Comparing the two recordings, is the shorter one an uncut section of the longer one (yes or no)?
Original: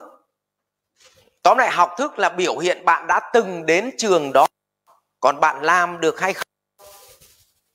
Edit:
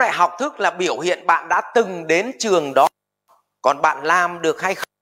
yes